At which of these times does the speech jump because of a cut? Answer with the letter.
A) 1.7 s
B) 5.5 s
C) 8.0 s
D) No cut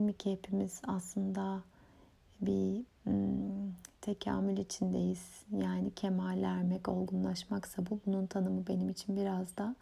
D